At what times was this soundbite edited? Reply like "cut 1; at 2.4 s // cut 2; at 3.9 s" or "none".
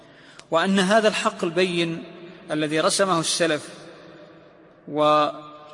none